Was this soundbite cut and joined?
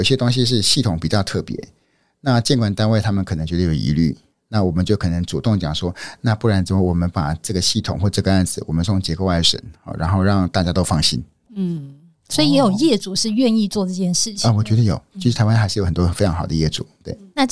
no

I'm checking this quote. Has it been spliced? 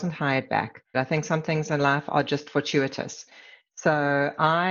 yes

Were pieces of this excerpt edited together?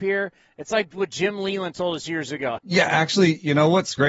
yes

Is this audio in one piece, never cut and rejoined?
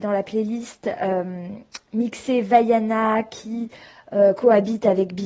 yes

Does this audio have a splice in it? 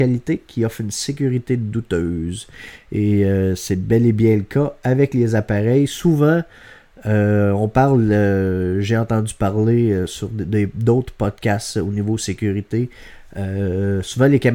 no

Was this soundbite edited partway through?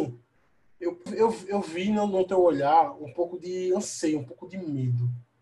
yes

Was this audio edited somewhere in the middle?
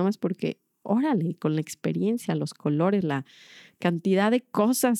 yes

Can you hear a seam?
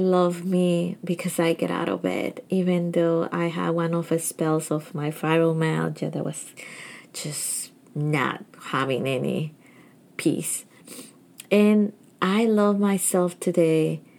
no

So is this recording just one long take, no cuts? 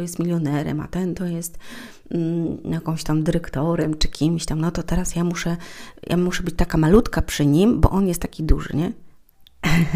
yes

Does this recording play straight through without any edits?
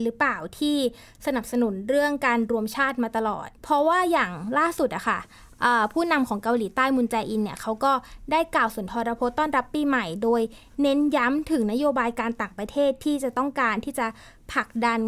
no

